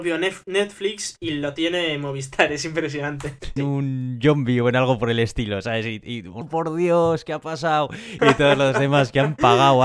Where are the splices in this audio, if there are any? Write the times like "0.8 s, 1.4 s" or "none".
3.6 s, 6.4 s, 8.2 s